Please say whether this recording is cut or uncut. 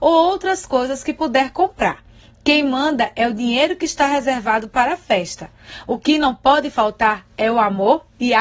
uncut